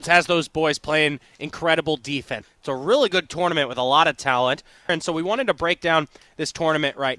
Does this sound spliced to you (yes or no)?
yes